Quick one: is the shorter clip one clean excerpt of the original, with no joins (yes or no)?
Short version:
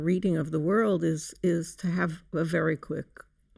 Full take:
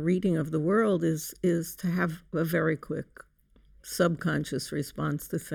yes